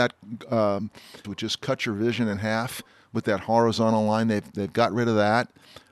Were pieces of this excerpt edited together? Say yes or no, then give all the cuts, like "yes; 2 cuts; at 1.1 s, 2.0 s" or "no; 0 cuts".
yes; 1 cut; at 1.2 s